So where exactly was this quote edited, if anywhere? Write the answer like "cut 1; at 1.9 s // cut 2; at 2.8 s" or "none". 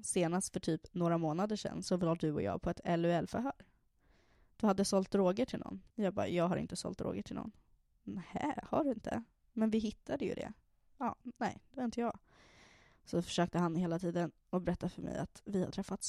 cut 1; at 5.9 s

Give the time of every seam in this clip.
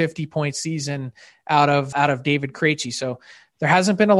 cut 1; at 1.9 s

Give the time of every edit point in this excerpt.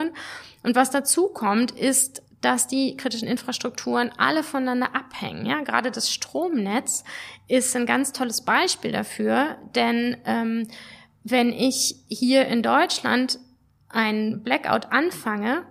none

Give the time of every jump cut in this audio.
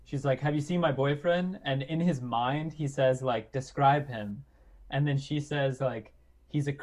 none

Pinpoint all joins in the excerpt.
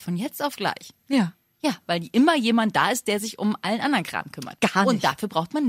none

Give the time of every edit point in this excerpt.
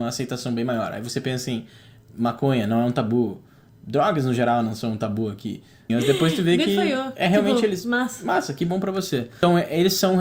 cut 1; at 5.9 s

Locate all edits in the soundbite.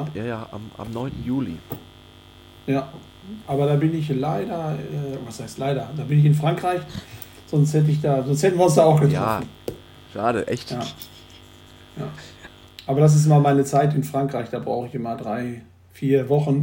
none

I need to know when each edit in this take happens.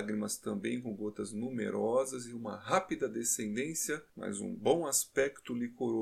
none

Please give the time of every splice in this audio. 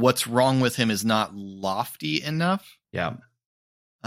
cut 1; at 2.8 s

